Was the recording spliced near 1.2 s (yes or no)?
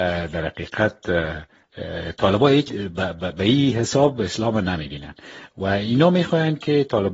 no